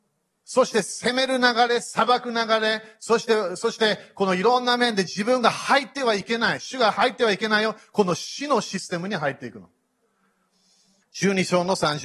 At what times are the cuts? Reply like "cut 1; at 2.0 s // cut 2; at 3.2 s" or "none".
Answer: cut 1; at 11.0 s

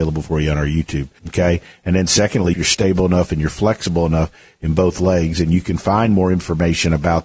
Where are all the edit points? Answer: cut 1; at 1.2 s // cut 2; at 2.5 s

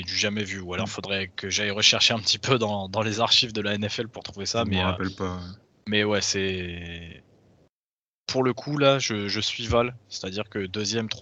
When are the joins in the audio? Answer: none

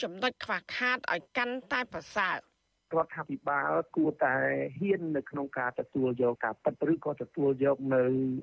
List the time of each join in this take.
cut 1; at 6.4 s

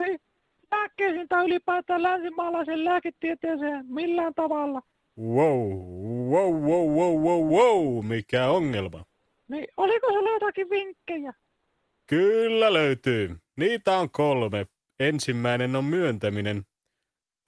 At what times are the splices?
cut 1; at 7.5 s

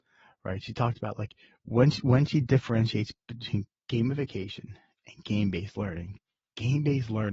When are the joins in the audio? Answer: none

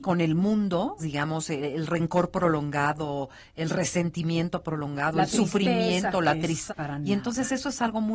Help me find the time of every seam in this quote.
cut 1; at 1.0 s // cut 2; at 6.7 s

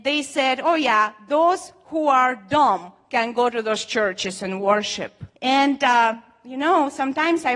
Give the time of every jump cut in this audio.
cut 1; at 5.3 s

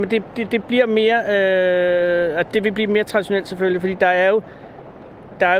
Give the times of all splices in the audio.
none

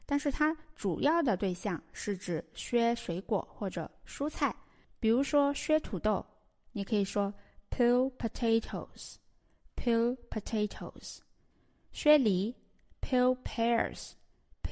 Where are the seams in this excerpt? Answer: none

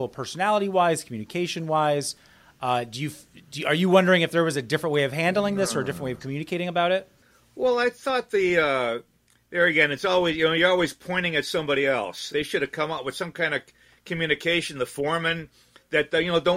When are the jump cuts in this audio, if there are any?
cut 1; at 12.3 s

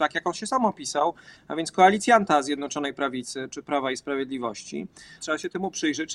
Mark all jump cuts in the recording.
cut 1; at 5.2 s

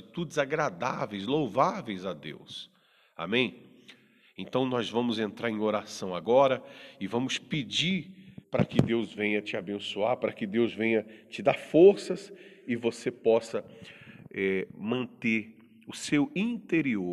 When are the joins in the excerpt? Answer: cut 1; at 8.4 s

